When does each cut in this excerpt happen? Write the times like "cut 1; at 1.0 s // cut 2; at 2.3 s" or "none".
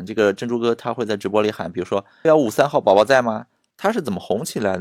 cut 1; at 2.2 s // cut 2; at 3.7 s